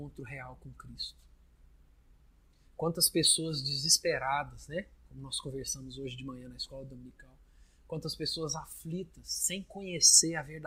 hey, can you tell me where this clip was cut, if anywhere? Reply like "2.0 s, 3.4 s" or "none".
none